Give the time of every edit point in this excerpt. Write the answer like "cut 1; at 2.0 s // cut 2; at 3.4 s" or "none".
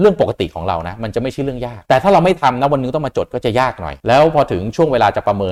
cut 1; at 1.9 s // cut 2; at 4.0 s